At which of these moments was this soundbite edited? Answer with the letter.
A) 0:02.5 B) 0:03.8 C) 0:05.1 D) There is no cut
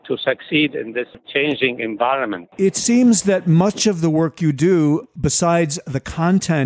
A